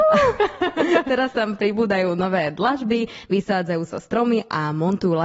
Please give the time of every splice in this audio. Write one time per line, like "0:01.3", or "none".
none